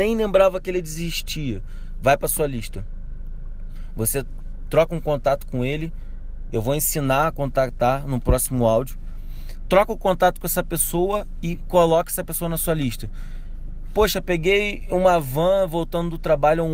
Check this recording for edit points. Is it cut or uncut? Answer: uncut